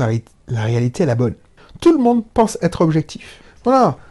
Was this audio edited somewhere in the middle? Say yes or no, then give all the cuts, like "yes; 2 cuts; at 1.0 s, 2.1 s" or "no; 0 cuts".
no; 0 cuts